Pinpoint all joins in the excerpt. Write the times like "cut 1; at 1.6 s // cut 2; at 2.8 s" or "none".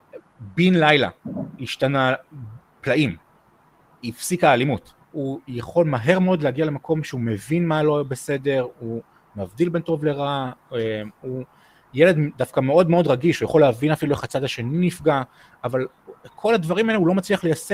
cut 1; at 5.0 s